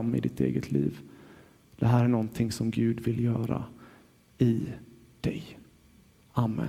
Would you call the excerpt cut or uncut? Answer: uncut